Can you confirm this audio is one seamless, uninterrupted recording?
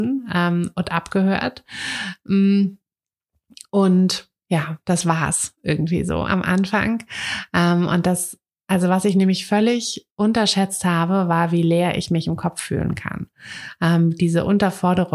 yes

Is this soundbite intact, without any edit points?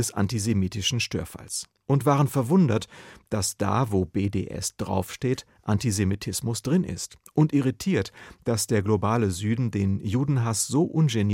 yes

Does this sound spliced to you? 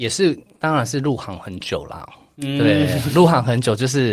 no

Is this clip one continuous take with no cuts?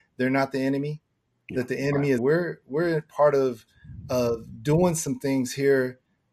no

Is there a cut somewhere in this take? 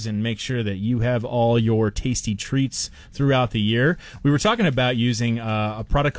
no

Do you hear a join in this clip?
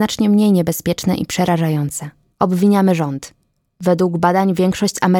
yes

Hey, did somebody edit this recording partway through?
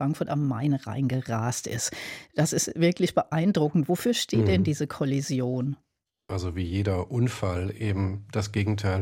yes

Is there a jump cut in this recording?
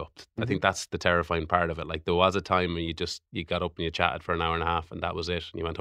no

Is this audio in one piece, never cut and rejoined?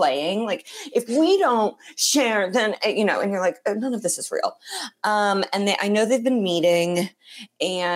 yes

